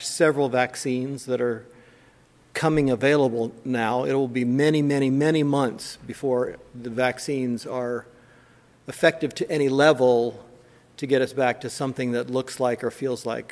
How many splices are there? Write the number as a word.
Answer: zero